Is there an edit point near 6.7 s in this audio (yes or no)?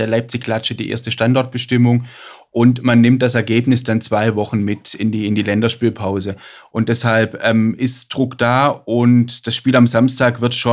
yes